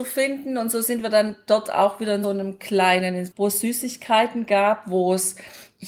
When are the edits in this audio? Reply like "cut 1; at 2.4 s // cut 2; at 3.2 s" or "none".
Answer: cut 1; at 2.2 s // cut 2; at 3.3 s